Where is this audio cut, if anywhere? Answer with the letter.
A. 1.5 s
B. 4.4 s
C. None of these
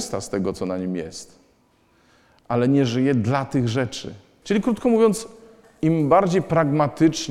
B